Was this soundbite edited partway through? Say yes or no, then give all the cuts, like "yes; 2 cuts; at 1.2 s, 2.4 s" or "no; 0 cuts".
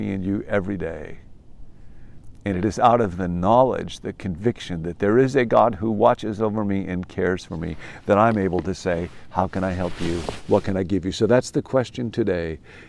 no; 0 cuts